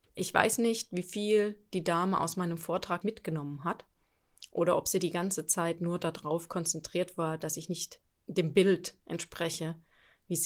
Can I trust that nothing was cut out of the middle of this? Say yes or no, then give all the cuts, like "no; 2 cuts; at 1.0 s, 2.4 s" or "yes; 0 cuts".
no; 1 cut; at 3.0 s